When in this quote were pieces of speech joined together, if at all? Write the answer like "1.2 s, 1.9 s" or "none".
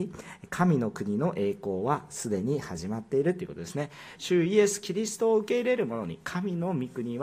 none